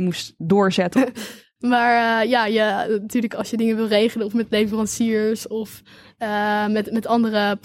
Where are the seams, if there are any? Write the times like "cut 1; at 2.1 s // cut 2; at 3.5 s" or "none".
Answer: cut 1; at 0.9 s